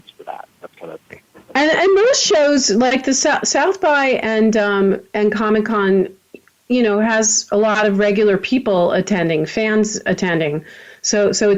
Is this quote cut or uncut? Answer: uncut